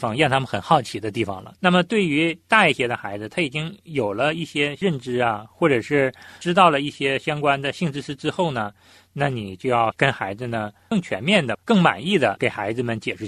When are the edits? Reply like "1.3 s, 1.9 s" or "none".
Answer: 1.6 s